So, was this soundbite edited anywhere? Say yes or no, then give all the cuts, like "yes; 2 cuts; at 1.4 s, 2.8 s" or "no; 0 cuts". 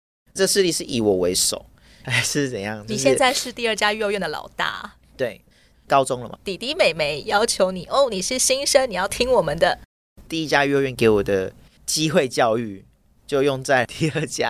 yes; 2 cuts; at 6.4 s, 10.2 s